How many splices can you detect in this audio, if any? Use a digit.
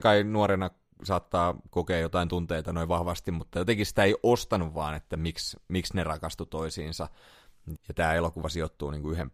1